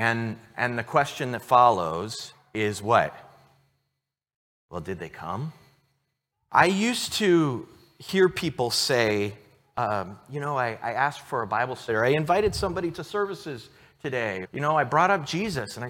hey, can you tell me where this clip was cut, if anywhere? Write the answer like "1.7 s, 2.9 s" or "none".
6.3 s, 11.9 s, 14.4 s